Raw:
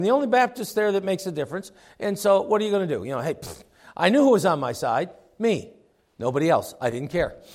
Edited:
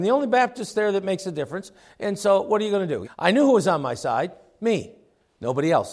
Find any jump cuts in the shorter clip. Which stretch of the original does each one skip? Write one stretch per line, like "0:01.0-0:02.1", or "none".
0:03.0-0:03.8